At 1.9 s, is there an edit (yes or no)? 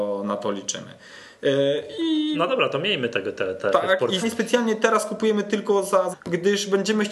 no